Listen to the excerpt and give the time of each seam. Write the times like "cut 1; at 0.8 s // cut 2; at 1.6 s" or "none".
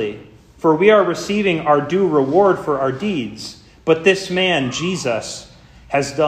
none